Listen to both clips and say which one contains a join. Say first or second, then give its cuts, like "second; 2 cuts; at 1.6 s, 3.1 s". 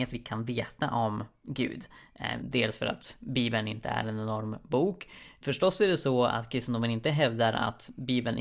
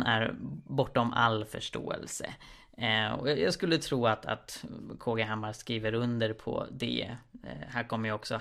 first; 2 cuts; at 2.4 s, 5.4 s